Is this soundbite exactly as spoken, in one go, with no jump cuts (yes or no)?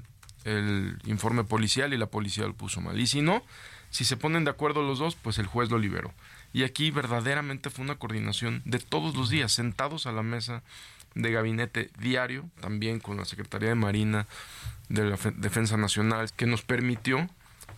no